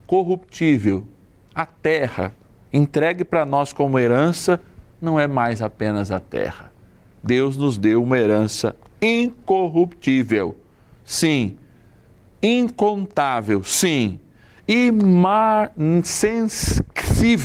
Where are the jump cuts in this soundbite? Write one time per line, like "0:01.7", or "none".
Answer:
none